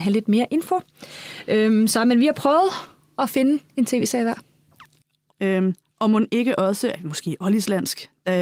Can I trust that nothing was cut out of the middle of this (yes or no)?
no